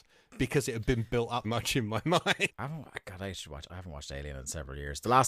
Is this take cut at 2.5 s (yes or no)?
yes